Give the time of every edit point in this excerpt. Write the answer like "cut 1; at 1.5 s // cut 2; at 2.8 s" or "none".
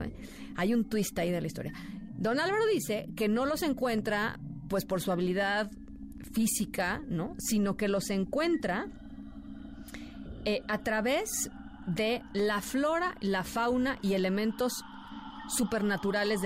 none

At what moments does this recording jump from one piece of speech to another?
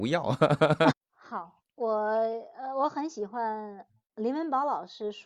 cut 1; at 0.9 s

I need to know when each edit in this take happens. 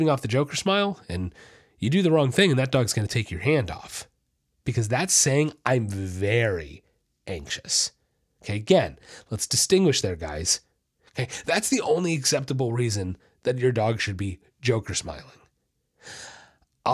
cut 1; at 11.1 s

